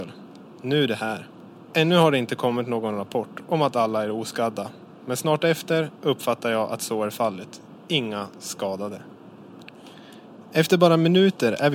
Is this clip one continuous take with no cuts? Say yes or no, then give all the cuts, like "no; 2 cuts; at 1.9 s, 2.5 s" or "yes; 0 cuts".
yes; 0 cuts